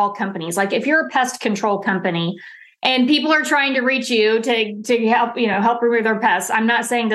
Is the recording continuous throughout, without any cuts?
yes; 0 cuts

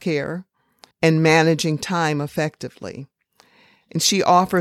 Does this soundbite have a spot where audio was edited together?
yes; 1 cut; at 0.9 s

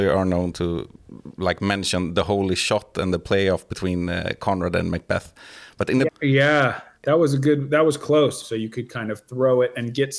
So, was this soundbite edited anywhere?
yes; 2 cuts; at 6.1 s, 8.4 s

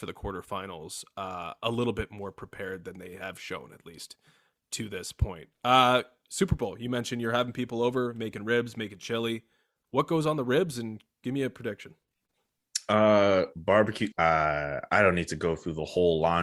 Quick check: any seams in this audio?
yes; 1 cut; at 14.1 s

